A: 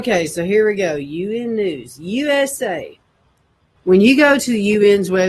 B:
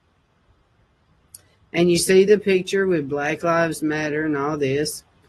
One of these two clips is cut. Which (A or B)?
A